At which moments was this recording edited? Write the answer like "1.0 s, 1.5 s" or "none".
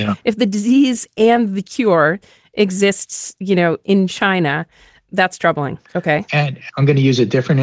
5.8 s